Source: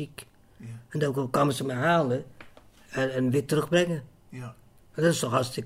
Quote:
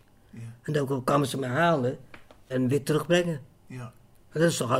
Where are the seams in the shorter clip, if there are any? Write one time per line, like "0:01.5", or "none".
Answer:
0:02.5